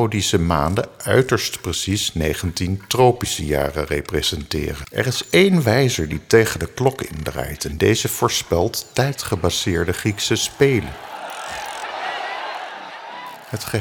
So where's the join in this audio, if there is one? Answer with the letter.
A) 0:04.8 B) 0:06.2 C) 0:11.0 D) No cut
A